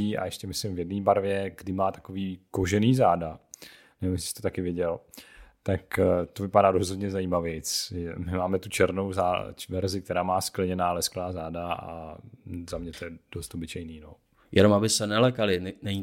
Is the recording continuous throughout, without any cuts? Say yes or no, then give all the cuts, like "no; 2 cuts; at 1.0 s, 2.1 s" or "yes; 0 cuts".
yes; 0 cuts